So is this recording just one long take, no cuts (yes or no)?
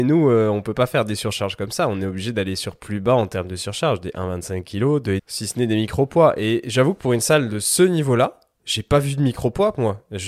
no